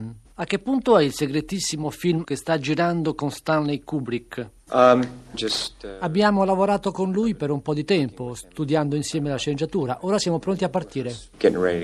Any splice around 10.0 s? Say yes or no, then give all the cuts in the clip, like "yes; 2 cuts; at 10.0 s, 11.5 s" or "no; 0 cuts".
no; 1 cut; at 5.3 s